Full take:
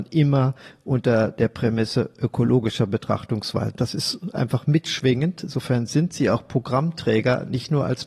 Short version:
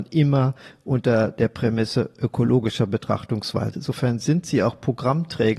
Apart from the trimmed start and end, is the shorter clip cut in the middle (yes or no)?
yes